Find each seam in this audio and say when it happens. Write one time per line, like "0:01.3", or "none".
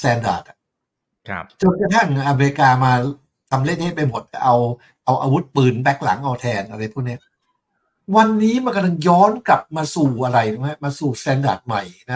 none

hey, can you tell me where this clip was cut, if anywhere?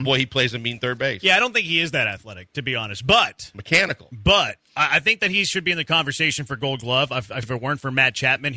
0:07.4

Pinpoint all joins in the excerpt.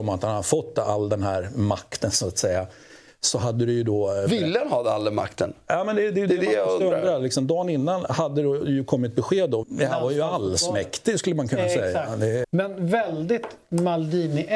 0:09.6
0:12.4

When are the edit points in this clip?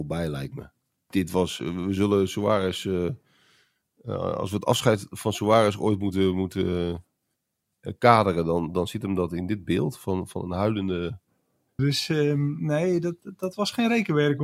0:11.8
0:13.2

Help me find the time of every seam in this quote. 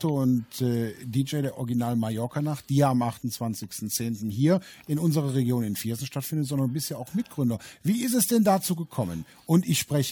none

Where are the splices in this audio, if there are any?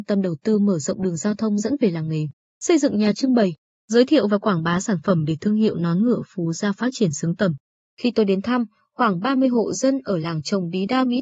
0:07.8

